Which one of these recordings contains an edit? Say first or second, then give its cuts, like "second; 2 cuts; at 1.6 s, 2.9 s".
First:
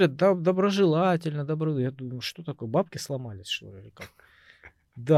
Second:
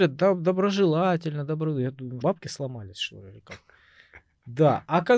second; 1 cut; at 2.2 s